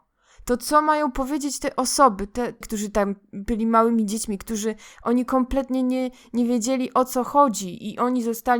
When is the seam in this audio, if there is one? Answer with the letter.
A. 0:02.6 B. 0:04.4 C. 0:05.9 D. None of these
A